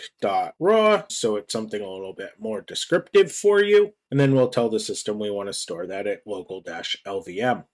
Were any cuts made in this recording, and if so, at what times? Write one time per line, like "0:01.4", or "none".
0:01.1